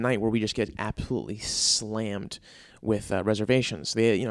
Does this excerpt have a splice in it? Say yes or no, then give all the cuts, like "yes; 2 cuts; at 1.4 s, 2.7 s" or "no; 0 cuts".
no; 0 cuts